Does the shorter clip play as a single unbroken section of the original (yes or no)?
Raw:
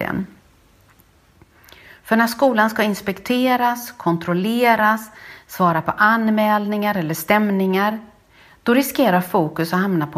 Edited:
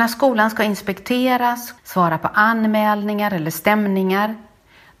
no